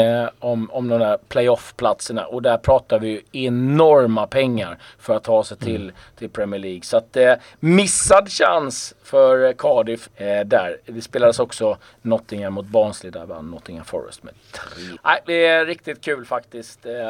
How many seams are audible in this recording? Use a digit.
2